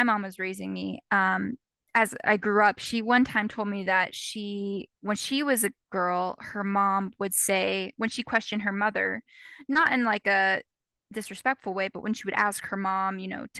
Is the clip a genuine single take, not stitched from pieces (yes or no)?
yes